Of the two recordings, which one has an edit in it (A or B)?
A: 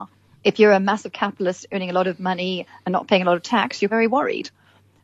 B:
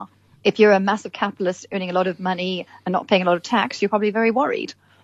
A